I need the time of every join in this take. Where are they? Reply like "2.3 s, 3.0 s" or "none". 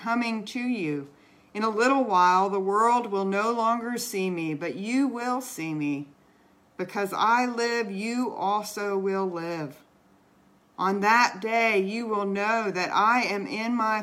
none